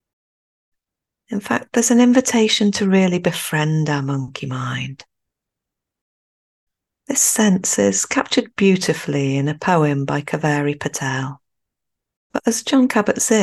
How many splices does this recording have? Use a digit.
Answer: 1